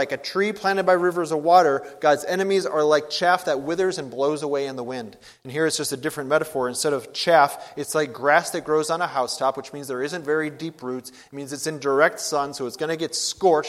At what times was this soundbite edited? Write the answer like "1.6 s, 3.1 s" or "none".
none

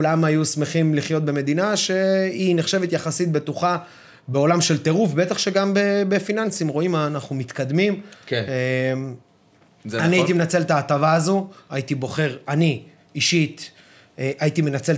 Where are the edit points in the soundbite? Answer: 8.1 s

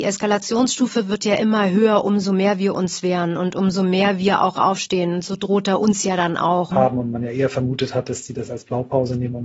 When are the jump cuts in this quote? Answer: 6.7 s

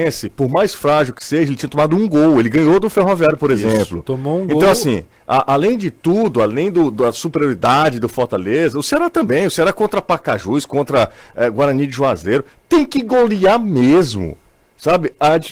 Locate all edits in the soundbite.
none

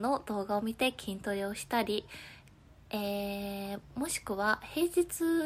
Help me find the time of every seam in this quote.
none

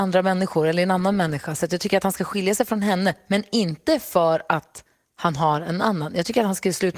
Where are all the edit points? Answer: none

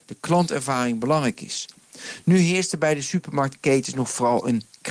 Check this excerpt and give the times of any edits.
none

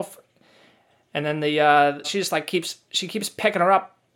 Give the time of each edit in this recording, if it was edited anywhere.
2.0 s

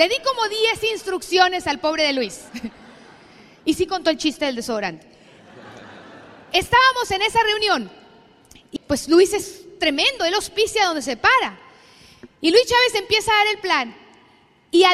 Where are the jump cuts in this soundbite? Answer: 8.8 s

